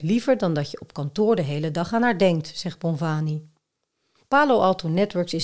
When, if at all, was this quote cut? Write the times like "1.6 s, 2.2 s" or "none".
none